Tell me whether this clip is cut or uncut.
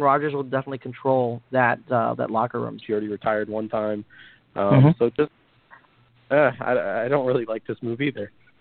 cut